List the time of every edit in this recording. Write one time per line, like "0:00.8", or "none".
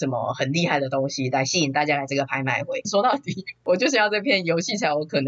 0:02.8